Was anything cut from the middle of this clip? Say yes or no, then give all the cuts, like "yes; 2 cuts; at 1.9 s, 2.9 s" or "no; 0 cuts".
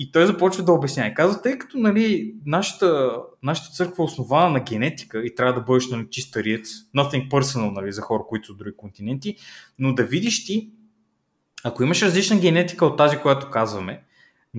no; 0 cuts